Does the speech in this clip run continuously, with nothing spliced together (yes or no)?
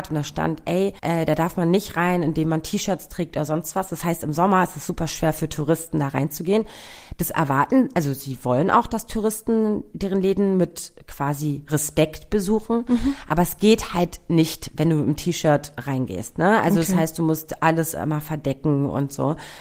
no